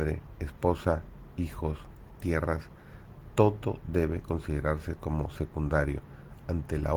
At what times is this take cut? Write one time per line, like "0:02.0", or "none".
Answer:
0:02.2